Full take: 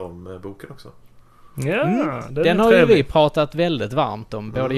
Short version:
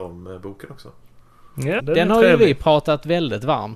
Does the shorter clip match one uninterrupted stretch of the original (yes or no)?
no